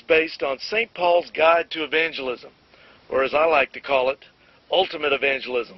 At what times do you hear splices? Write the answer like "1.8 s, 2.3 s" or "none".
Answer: none

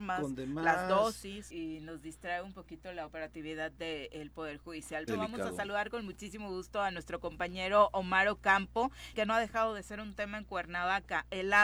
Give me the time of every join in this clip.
1.5 s, 5.1 s, 9.1 s

